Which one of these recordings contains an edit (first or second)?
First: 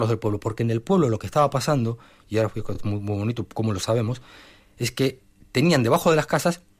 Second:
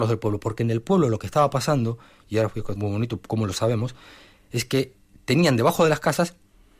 second